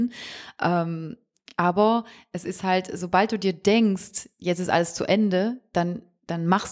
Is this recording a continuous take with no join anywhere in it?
yes; 0 cuts

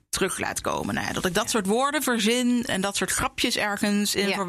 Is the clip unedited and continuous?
no; 1 cut; at 2.7 s

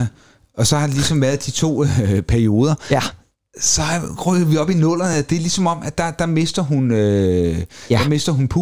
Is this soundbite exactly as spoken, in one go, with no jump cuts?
yes; 0 cuts

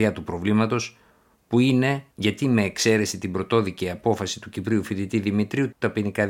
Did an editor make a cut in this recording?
no; 0 cuts

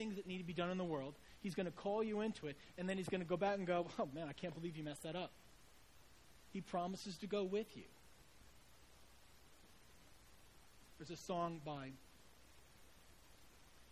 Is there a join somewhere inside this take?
yes; 1 cut; at 6.5 s

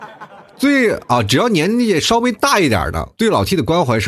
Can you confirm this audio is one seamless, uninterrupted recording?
no; 1 cut; at 3.1 s

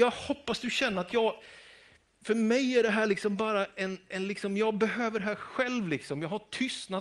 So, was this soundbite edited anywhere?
no; 0 cuts

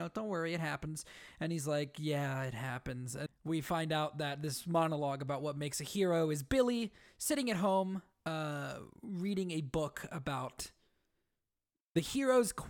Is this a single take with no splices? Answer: no; 1 cut; at 3.3 s

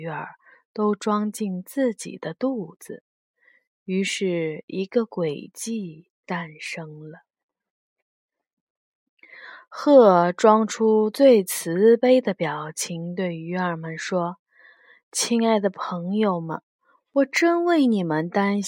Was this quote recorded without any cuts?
yes; 0 cuts

